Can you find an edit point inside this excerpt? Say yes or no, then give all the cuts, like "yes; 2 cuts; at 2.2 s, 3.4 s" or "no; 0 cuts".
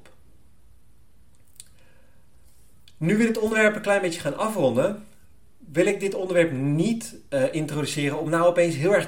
no; 0 cuts